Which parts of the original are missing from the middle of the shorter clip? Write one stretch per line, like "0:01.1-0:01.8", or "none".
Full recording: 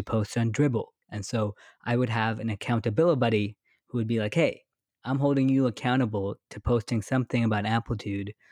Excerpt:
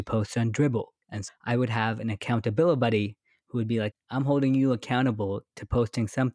0:01.3-0:01.7
0:04.3-0:04.8